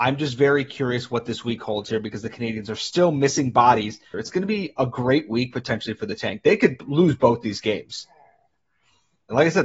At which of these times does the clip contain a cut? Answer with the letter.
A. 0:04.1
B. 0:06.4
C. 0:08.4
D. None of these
A